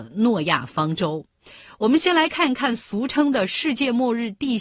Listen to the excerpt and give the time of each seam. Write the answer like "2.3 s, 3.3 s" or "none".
none